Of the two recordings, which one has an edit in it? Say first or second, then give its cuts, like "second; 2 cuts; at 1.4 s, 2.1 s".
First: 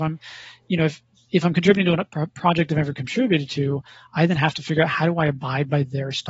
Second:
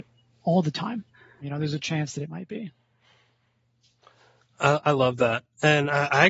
second; 1 cut; at 1.4 s